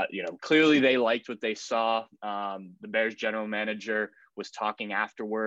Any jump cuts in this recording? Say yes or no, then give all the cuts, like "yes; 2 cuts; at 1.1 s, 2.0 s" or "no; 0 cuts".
no; 0 cuts